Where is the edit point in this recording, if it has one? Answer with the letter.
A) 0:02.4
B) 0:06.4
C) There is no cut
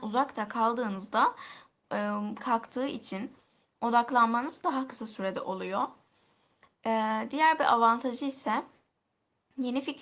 A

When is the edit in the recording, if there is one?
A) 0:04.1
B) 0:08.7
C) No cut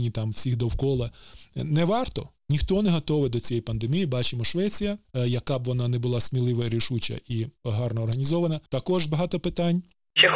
B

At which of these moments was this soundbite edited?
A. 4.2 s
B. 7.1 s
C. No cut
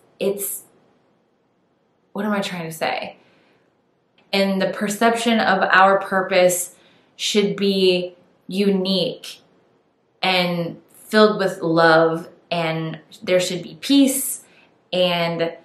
A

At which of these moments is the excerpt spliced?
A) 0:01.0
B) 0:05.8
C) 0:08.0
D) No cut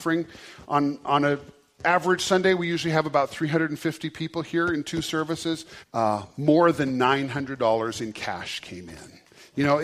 B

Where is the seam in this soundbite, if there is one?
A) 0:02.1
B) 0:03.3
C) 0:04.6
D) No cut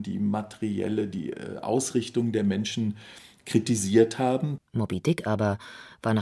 C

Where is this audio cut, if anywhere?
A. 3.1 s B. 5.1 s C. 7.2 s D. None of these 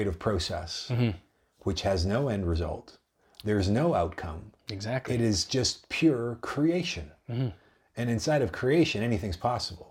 D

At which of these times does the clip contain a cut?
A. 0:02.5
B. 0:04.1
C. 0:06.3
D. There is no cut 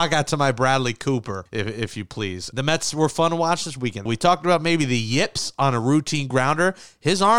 B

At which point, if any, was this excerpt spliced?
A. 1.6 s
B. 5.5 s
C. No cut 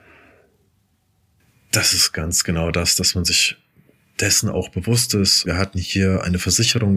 B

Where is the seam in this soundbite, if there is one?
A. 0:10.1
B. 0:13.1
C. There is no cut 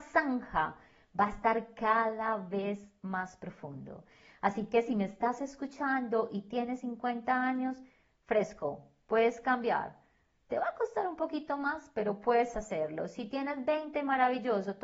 C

